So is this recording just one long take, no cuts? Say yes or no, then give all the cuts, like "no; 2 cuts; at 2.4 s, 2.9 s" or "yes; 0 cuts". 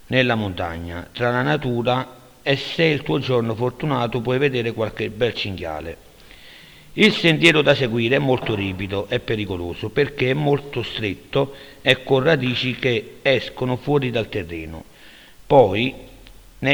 no; 1 cut; at 15.4 s